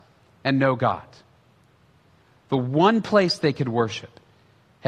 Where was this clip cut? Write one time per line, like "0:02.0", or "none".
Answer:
none